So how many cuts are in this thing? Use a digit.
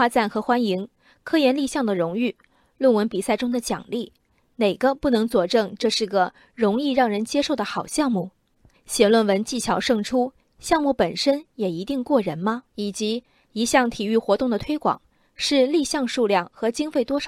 2